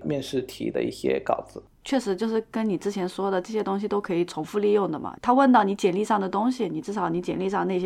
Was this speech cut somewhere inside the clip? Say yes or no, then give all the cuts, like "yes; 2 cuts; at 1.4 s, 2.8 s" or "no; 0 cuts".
no; 0 cuts